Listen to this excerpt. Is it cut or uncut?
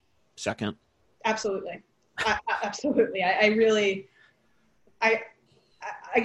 uncut